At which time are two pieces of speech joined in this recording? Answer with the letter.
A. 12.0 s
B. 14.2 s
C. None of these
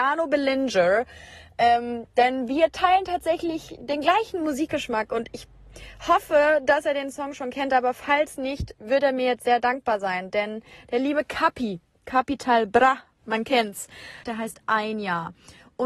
B